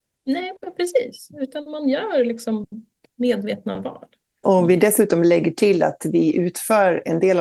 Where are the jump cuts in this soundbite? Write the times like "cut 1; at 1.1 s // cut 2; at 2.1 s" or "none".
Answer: cut 1; at 4.4 s